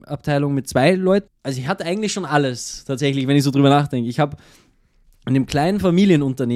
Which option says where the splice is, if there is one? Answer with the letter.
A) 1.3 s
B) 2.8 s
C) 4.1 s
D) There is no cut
A